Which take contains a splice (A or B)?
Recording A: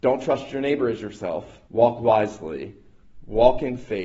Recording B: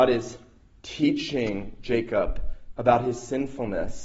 A